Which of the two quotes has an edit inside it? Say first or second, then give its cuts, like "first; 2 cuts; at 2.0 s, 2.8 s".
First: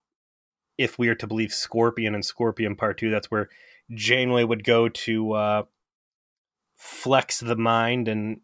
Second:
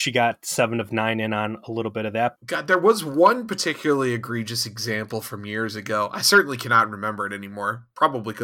second; 1 cut; at 2.4 s